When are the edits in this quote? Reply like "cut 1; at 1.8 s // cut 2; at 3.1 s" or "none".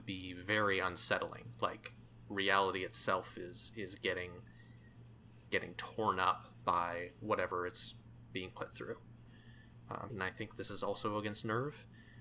cut 1; at 10.1 s